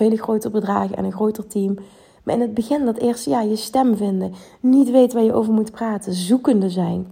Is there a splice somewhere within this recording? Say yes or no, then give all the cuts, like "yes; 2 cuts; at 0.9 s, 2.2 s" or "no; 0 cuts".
no; 0 cuts